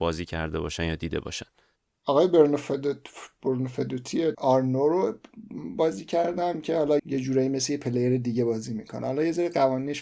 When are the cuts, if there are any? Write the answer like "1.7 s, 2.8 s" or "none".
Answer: 4.3 s, 7.0 s